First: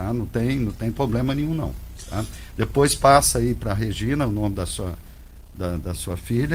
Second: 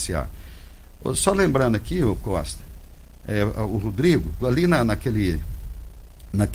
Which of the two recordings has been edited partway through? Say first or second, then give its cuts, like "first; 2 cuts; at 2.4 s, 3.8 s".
second; 1 cut; at 4.4 s